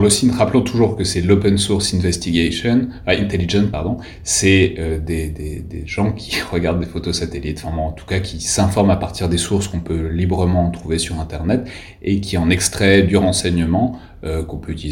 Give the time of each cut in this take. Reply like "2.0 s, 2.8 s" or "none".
none